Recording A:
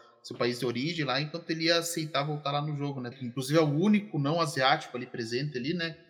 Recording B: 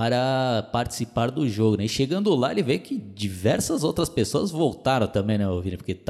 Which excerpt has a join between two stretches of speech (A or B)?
A